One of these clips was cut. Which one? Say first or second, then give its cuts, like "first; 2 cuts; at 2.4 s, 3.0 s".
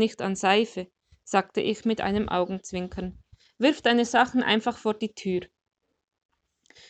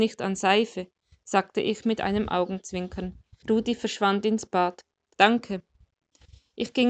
second; 2 cuts; at 3.4 s, 5.1 s